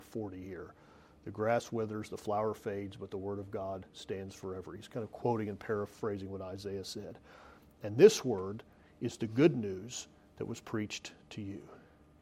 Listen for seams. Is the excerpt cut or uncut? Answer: uncut